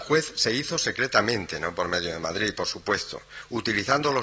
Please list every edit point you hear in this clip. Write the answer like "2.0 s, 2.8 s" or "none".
none